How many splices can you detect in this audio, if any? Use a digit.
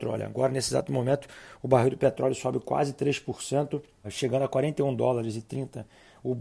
1